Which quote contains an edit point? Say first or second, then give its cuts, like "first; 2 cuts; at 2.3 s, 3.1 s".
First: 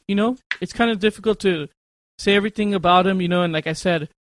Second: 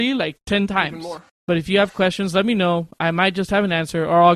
second; 1 cut; at 1.3 s